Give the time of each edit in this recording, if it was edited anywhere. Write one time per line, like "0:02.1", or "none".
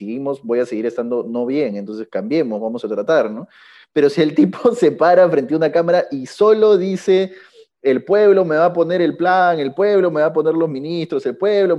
none